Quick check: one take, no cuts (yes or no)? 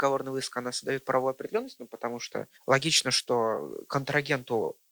no